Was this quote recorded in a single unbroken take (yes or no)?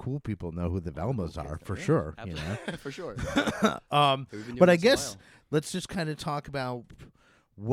yes